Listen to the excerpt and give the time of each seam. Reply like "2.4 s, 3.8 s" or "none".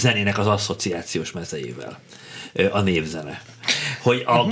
none

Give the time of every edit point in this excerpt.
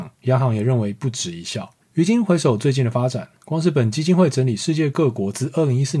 none

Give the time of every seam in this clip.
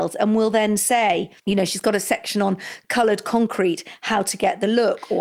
1.4 s

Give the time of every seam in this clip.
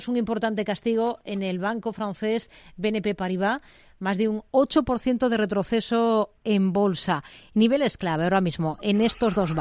none

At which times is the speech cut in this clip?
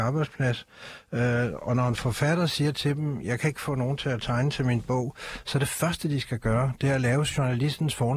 none

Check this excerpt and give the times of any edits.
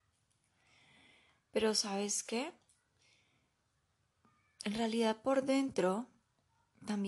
none

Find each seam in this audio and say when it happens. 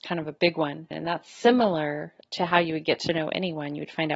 0.9 s

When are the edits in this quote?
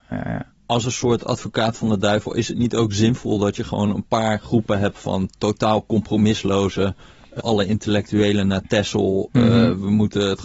7.4 s

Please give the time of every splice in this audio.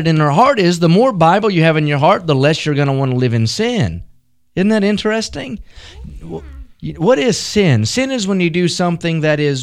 none

